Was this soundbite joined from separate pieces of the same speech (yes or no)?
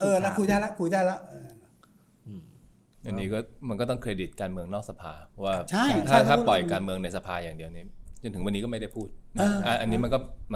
no